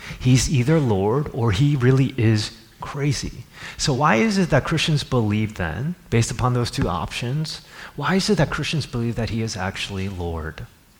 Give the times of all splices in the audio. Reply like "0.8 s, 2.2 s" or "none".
none